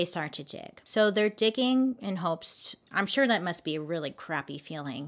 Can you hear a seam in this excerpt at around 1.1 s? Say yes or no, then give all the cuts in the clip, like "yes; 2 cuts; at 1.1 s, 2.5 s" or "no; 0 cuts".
no; 1 cut; at 2.8 s